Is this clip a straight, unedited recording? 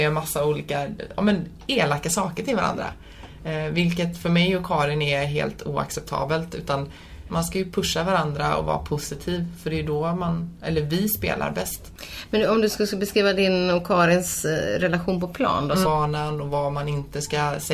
no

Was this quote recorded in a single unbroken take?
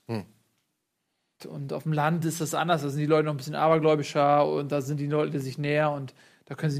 no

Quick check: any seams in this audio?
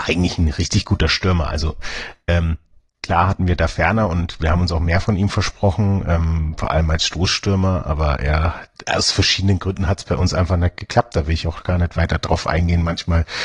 no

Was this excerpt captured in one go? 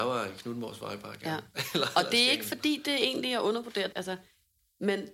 no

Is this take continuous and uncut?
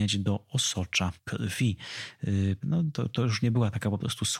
no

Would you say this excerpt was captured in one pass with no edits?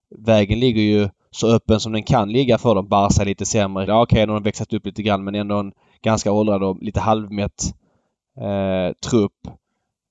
no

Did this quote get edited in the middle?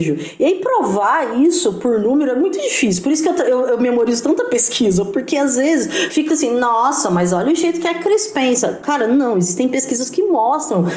yes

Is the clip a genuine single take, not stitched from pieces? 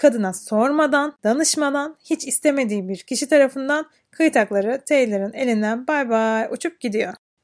yes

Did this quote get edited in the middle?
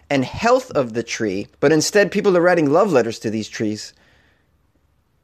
yes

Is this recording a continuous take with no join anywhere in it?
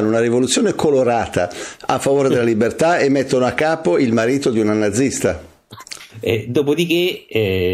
no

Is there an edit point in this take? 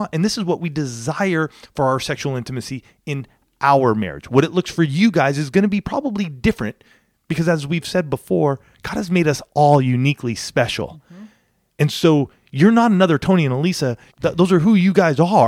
yes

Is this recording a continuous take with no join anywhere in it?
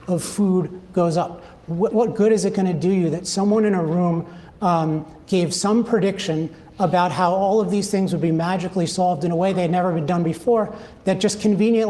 no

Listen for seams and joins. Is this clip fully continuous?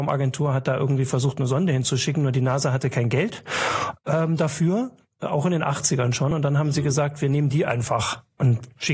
yes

